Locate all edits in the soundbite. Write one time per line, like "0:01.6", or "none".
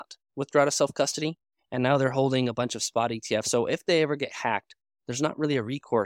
none